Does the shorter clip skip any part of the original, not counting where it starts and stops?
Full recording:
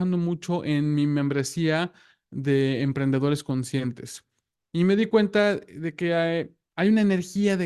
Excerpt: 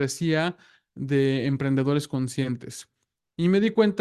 no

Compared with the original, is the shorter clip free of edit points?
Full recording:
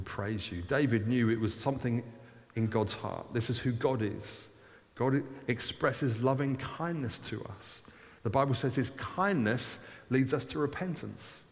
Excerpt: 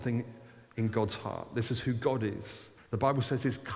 no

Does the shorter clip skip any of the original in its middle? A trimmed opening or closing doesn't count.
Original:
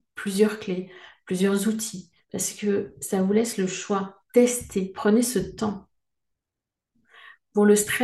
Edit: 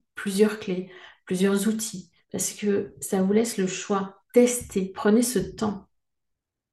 no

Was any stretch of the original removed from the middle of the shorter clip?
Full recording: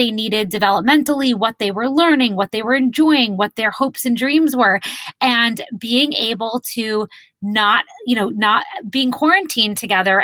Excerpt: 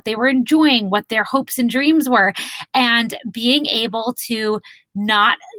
no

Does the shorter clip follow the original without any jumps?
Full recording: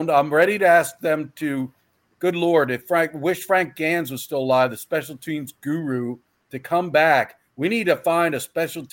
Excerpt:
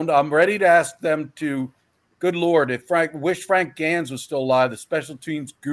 yes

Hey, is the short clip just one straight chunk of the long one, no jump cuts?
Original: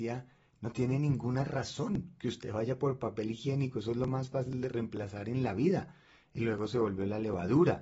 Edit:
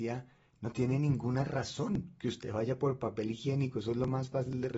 yes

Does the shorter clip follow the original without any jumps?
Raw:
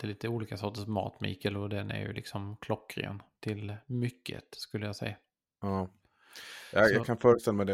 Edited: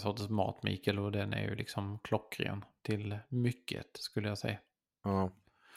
yes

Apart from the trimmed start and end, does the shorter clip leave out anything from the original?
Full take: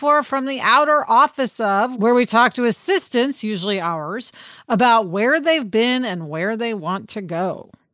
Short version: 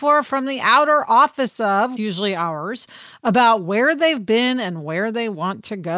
yes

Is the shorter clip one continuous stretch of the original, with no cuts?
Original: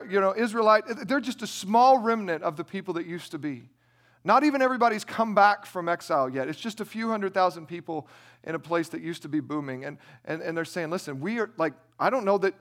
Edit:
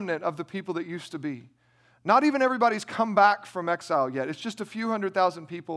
yes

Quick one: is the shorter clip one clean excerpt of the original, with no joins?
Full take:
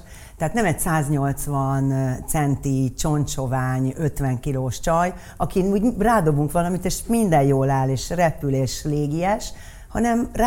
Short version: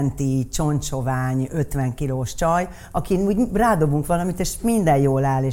yes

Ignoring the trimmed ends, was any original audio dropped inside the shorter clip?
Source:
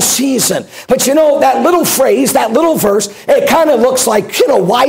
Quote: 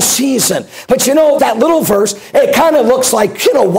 yes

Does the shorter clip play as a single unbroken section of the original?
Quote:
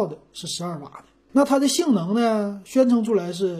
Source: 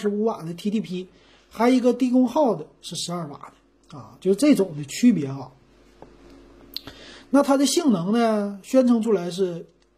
no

